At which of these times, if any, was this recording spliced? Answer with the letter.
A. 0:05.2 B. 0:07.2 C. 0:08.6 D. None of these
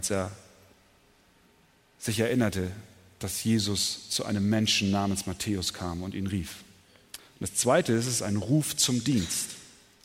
B